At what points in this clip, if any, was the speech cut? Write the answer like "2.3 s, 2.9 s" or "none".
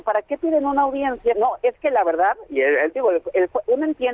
1.3 s